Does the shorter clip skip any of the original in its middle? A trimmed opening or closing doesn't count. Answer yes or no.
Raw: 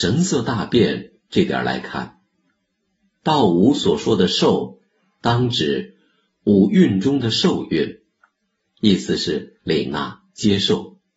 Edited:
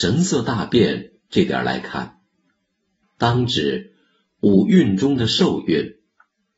yes